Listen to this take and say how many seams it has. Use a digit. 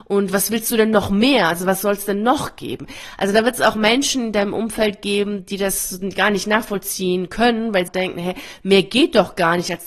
1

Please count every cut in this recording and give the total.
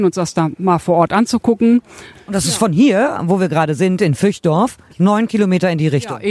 2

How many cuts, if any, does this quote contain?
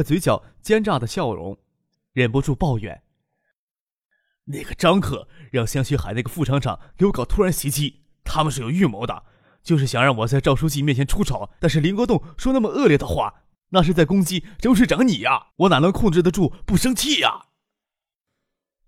2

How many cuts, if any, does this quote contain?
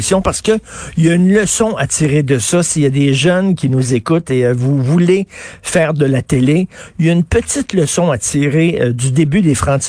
0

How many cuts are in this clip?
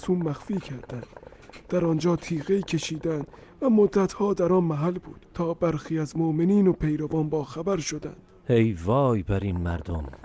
1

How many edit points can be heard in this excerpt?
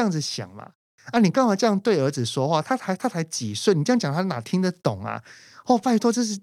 0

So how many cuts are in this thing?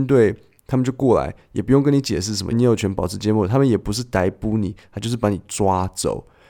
1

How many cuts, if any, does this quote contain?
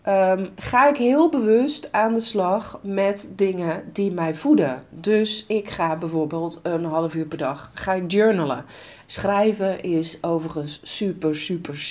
2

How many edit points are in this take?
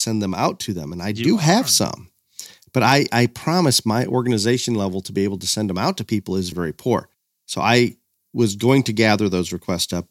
1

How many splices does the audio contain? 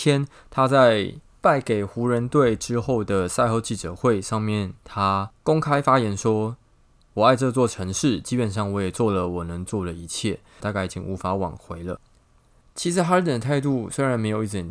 2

